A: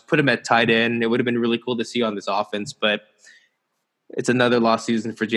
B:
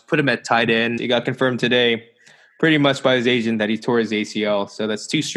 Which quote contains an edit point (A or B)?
B